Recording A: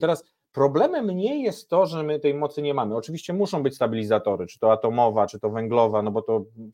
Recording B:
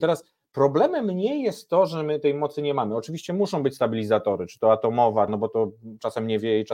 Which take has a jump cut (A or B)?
B